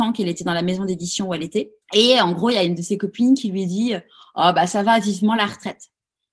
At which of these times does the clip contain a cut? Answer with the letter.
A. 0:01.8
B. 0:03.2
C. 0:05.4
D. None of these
A